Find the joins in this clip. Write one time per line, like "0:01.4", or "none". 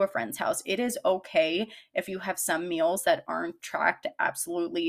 none